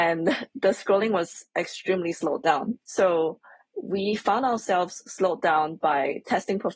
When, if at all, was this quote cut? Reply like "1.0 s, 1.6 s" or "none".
2.8 s